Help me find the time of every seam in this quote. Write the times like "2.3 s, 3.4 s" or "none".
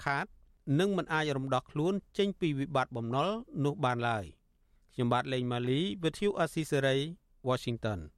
none